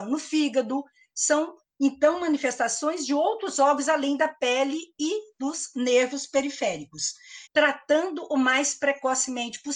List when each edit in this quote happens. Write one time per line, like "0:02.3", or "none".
0:07.5